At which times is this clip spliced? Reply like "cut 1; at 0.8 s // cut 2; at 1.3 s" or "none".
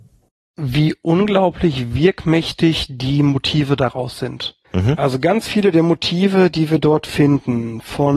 cut 1; at 4.6 s // cut 2; at 6.5 s